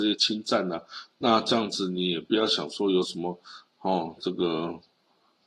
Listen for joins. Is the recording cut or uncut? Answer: uncut